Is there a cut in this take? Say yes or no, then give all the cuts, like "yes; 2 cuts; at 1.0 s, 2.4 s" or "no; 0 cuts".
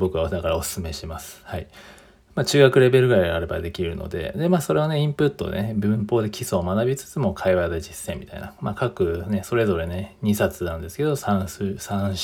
no; 0 cuts